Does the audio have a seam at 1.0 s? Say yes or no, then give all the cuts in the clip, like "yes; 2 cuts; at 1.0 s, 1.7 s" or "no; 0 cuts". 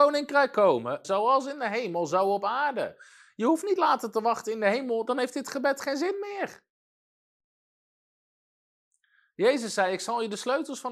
yes; 1 cut; at 1.0 s